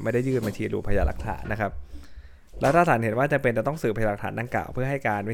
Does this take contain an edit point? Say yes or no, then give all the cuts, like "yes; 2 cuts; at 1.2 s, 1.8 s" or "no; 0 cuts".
yes; 1 cut; at 1.4 s